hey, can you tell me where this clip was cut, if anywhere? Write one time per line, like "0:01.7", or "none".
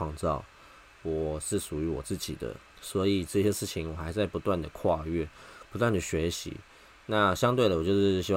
0:02.7